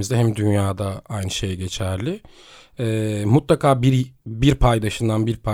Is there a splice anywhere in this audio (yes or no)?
no